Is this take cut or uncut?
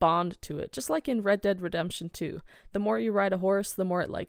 uncut